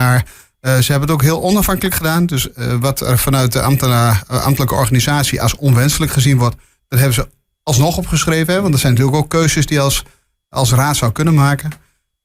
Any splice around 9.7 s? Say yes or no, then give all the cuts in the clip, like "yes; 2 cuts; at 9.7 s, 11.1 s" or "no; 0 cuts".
no; 0 cuts